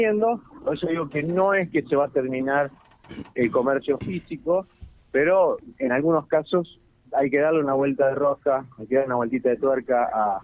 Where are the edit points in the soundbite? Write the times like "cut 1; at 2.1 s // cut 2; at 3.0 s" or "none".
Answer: none